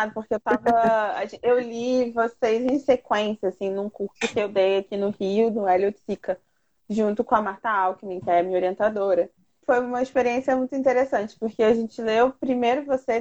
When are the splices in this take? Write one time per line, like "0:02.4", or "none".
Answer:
0:09.6